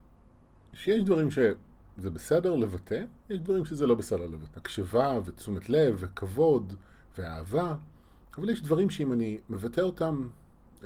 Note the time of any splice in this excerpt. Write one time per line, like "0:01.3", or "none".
0:04.5